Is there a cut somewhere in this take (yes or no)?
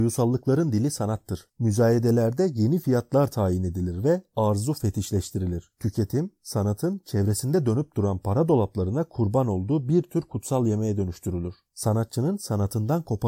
yes